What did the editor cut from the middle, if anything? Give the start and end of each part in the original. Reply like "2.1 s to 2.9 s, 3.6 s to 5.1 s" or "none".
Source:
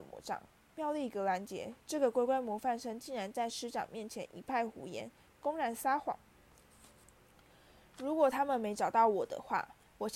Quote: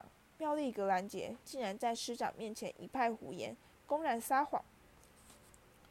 1.8 s to 3.0 s